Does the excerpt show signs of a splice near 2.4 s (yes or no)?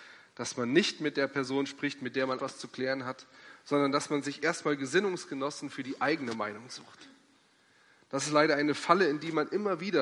yes